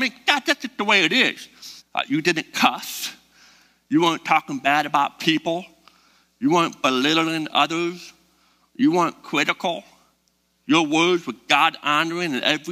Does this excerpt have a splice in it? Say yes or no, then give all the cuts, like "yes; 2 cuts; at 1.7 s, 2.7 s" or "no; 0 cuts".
yes; 1 cut; at 1.8 s